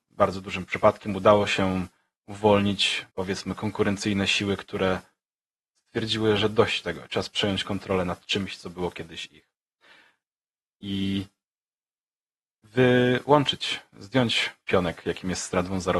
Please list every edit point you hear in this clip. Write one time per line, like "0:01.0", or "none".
0:03.1

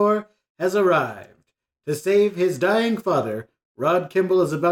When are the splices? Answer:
none

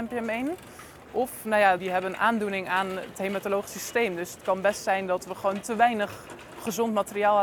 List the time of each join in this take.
0:01.8

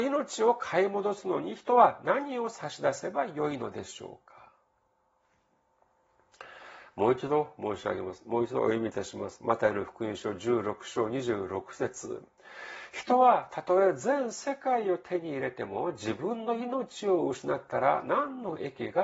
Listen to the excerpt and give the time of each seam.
none

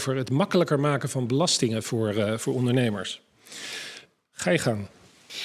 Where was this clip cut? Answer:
none

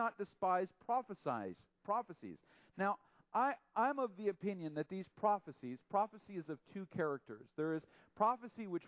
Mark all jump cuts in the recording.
none

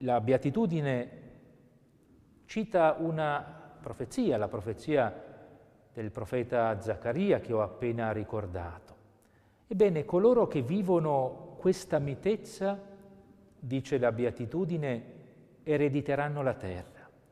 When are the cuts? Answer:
0:09.6

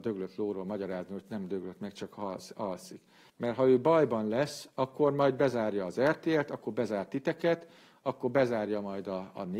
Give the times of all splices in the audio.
0:03.3

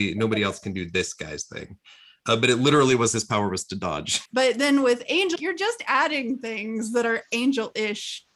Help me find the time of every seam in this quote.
0:04.3
0:05.4

